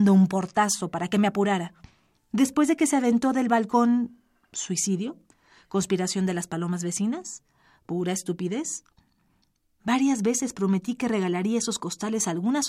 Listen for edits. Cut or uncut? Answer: cut